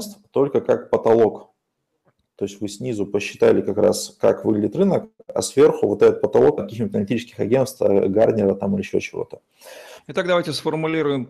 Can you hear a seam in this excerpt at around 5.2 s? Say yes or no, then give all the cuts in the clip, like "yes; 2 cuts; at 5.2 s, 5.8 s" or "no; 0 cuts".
no; 2 cuts; at 6.6 s, 10.0 s